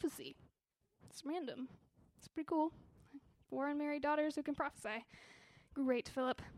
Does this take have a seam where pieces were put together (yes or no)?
no